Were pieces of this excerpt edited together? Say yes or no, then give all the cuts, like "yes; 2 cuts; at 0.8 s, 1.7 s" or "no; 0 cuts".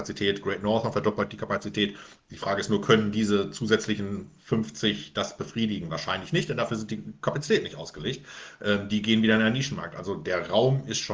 yes; 1 cut; at 2.2 s